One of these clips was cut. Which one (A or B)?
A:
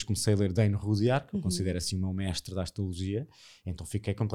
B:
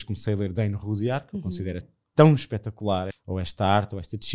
B